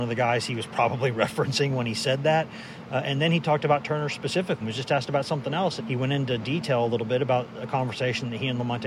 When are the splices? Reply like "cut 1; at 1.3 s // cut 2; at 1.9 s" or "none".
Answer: cut 1; at 4.6 s // cut 2; at 5.8 s